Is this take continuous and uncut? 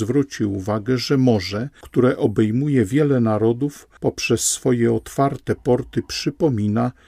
yes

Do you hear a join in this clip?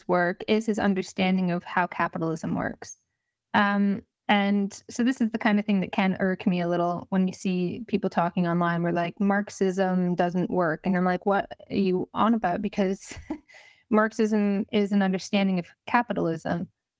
no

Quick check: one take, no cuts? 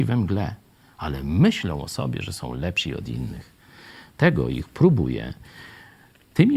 yes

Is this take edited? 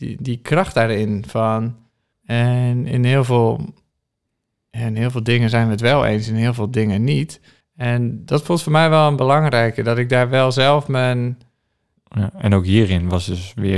yes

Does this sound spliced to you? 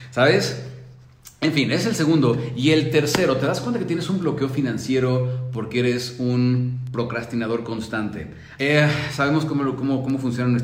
yes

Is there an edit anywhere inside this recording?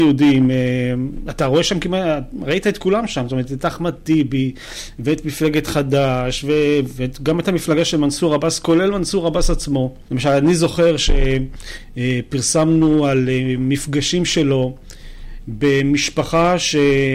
yes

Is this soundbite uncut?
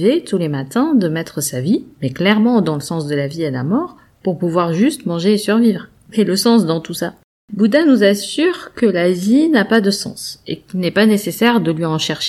yes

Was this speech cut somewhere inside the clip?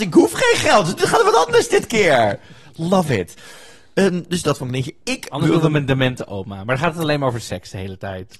yes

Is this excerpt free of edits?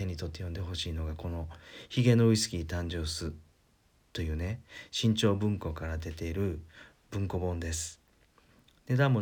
yes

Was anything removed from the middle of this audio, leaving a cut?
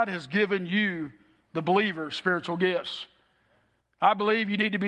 no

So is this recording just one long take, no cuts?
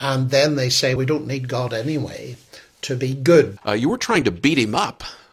no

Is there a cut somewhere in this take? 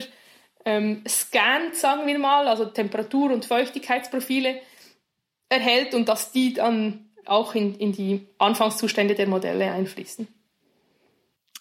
yes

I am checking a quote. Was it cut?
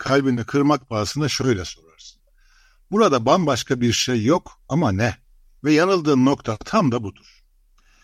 yes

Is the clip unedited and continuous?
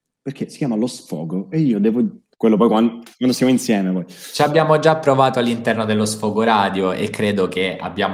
no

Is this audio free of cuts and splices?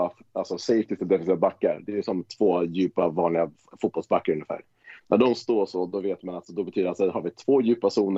yes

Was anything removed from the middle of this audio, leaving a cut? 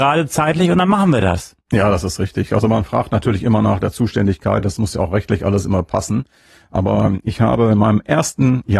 no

